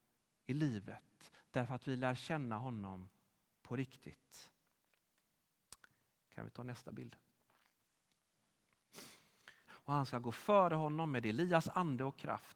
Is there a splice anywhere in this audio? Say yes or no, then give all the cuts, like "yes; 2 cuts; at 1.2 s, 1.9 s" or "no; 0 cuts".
yes; 1 cut; at 9.6 s